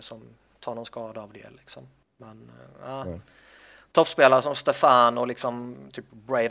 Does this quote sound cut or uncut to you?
uncut